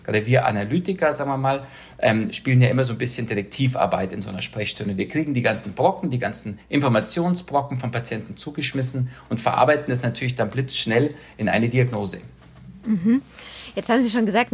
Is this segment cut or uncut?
uncut